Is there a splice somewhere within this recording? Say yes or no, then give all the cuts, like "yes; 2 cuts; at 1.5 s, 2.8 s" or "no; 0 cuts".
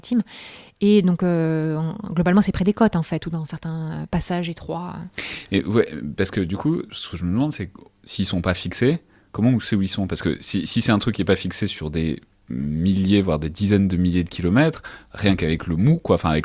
no; 0 cuts